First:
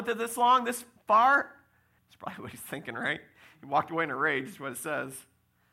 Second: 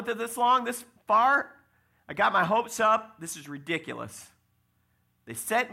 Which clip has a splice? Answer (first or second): first